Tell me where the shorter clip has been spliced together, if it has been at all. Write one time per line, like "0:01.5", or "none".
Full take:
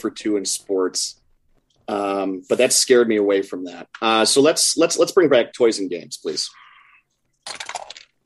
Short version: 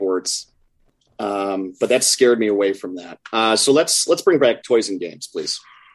0:04.1